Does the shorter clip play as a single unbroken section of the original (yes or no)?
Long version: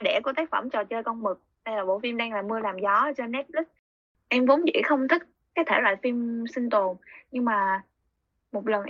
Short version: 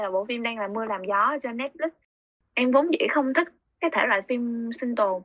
yes